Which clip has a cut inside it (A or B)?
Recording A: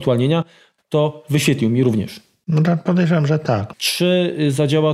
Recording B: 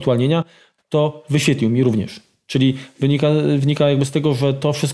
A